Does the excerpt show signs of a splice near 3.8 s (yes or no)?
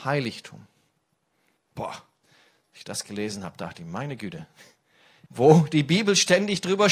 no